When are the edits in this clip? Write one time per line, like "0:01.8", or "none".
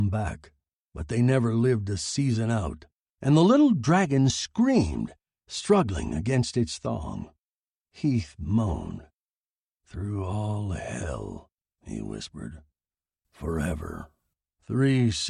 0:03.0